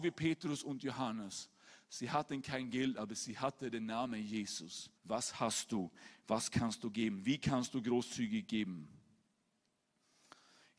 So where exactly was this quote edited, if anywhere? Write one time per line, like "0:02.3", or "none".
0:05.0